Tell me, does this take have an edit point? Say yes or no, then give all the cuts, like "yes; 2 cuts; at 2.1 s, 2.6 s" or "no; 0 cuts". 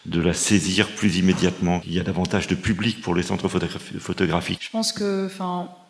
yes; 2 cuts; at 1.8 s, 4.6 s